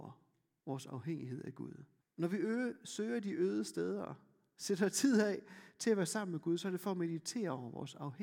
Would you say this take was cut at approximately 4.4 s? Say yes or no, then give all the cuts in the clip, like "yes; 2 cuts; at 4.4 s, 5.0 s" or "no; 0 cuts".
no; 1 cut; at 2.0 s